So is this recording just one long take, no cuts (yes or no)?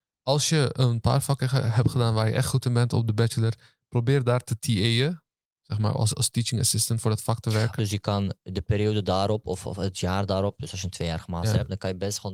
no